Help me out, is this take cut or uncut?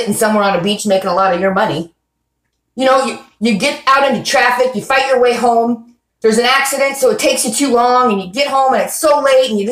uncut